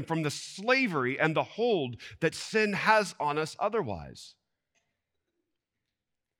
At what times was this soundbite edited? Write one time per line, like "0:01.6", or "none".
none